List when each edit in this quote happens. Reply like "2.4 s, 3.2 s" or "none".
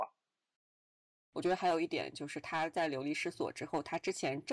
1.2 s